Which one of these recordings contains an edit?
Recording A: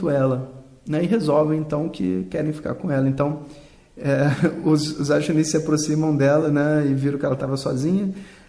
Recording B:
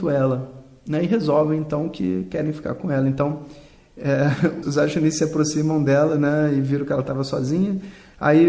B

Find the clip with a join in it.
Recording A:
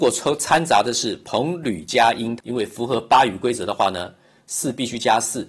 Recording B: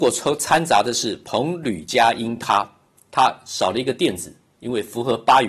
A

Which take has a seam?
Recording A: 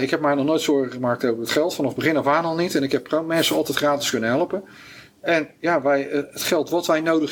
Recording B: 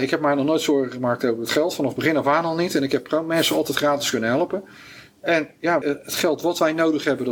B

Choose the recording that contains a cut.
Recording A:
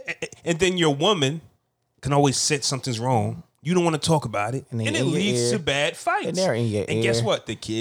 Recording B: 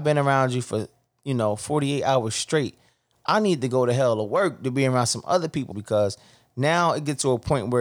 B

